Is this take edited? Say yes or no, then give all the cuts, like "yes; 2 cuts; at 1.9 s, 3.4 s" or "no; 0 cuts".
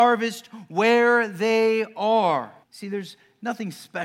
yes; 1 cut; at 2.6 s